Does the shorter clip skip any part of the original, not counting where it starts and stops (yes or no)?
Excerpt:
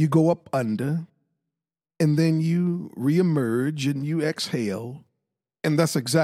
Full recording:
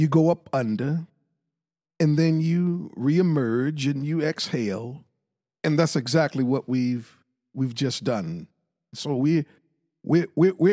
no